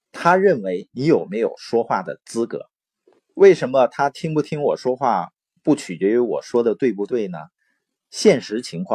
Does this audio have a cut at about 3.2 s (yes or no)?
yes